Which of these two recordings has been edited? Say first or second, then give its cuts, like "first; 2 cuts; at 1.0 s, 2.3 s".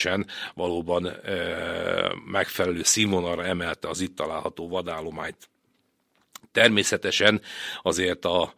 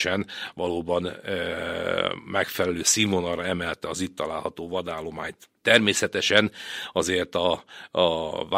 second; 1 cut; at 5.6 s